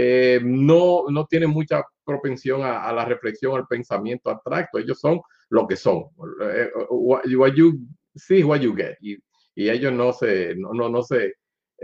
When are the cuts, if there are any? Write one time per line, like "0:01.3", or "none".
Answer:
0:09.0